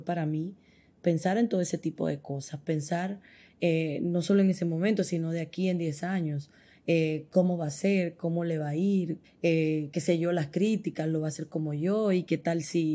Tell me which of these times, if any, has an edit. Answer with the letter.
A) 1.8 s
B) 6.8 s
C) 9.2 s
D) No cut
C